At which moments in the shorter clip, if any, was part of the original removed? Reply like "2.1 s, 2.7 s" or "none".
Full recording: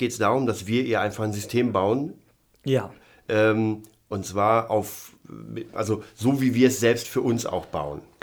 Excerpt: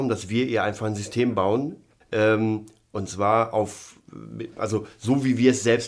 2.0 s